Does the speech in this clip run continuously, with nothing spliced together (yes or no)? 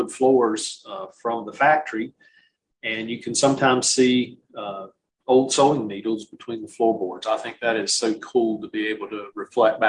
yes